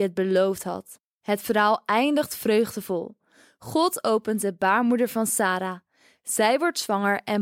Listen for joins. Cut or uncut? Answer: uncut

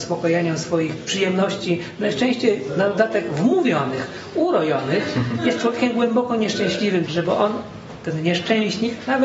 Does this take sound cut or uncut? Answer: cut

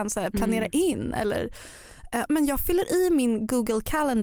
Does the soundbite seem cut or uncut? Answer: cut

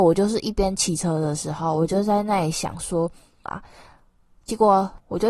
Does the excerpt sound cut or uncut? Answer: cut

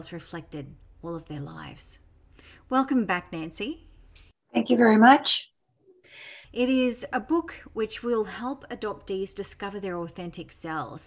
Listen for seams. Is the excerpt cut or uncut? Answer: cut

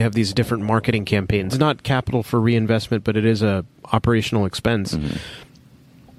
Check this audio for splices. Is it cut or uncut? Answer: cut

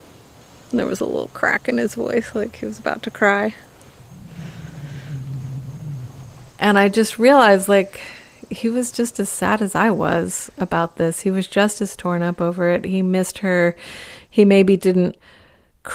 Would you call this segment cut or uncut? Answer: uncut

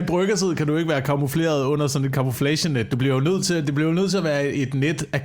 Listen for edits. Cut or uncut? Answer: uncut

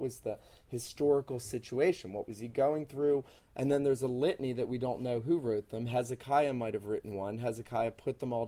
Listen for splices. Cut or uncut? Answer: cut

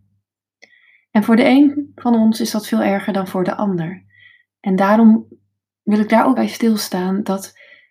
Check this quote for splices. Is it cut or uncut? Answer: cut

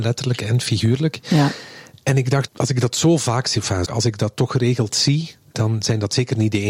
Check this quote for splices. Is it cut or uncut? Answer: cut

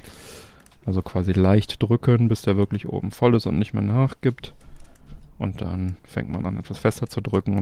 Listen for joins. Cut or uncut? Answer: cut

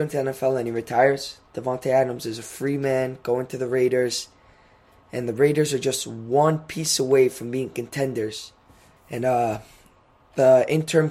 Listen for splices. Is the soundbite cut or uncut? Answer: cut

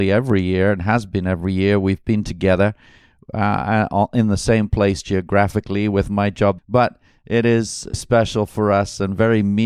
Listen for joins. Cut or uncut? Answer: cut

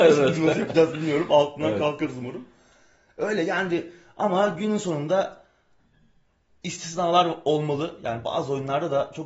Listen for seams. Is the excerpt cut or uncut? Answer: uncut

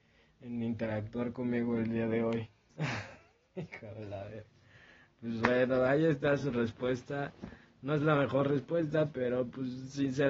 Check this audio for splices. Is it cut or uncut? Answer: cut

